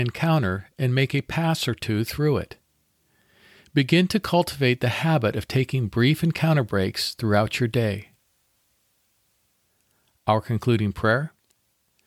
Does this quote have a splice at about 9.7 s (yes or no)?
no